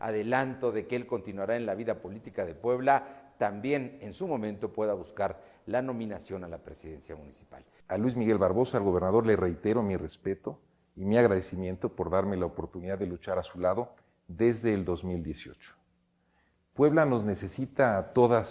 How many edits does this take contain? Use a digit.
1